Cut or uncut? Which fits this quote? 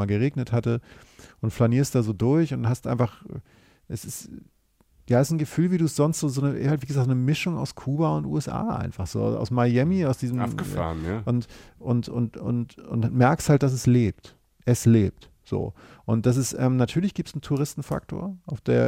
uncut